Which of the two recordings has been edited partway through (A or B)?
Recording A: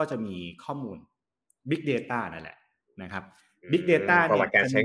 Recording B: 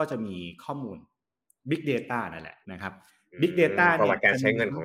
B